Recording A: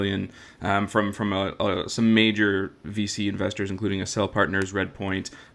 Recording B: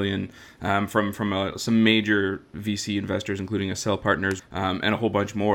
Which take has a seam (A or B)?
B